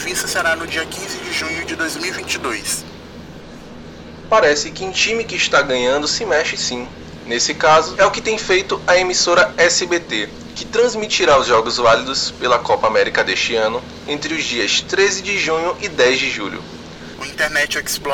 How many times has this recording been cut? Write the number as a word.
two